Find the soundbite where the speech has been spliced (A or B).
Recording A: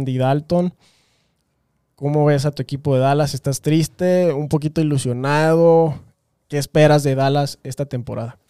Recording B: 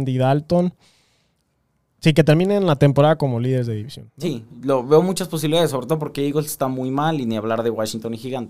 B